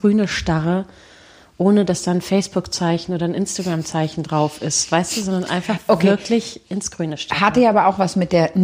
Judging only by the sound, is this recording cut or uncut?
uncut